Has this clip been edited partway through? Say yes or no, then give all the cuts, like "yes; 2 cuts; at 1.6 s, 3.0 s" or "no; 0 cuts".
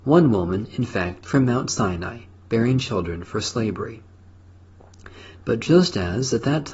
yes; 2 cuts; at 1.2 s, 5.3 s